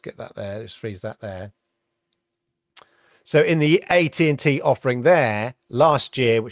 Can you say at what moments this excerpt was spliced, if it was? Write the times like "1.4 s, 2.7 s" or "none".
none